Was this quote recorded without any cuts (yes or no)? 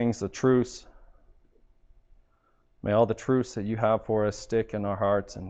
yes